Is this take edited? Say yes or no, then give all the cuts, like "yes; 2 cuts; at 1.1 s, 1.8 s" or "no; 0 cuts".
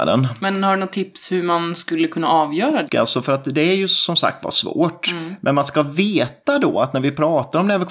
yes; 1 cut; at 2.9 s